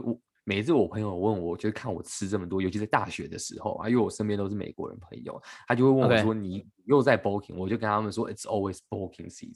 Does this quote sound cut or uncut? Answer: uncut